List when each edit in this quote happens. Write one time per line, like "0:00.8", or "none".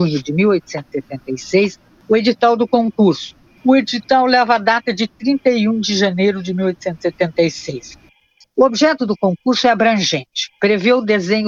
none